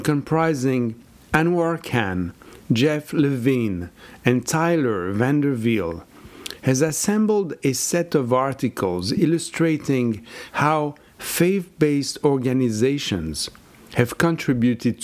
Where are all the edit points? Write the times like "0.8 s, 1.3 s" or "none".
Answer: none